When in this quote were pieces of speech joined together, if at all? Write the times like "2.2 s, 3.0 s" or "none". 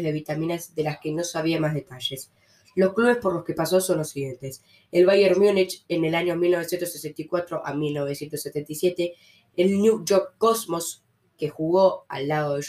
none